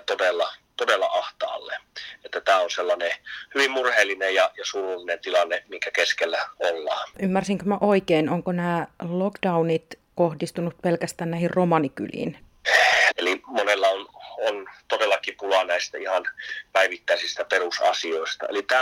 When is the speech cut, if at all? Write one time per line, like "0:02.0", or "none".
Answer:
0:07.1
0:13.1